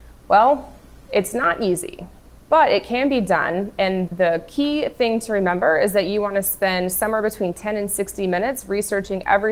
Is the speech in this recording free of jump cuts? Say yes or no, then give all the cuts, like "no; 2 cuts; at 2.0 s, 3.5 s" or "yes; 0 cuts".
no; 1 cut; at 4.1 s